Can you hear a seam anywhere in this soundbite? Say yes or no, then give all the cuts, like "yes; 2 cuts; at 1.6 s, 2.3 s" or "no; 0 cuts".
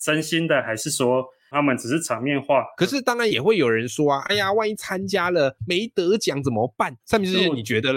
yes; 2 cuts; at 2.7 s, 7.0 s